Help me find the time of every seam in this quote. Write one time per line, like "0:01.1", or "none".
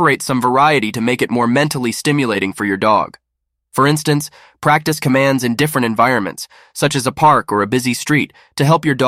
none